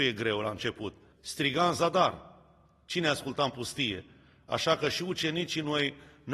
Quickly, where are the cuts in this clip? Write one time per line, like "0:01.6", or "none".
0:01.1